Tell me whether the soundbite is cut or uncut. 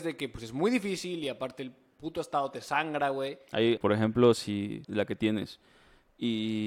cut